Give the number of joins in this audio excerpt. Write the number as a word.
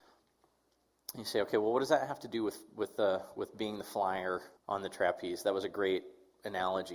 one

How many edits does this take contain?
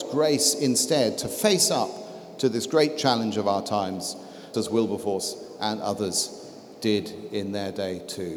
one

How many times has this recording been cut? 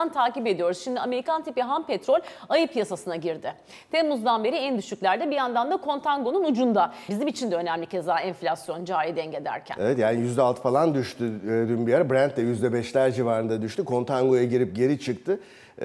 one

